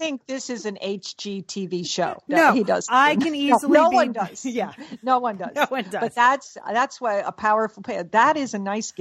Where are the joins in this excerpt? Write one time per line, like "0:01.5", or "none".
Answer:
0:02.3